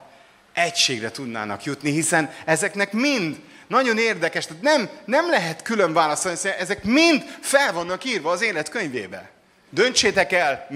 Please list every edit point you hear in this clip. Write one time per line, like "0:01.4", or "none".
0:09.7